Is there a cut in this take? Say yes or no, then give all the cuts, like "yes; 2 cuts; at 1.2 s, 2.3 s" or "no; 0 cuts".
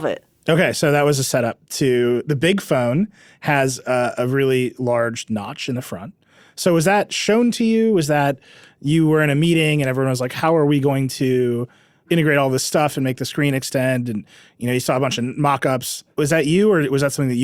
no; 0 cuts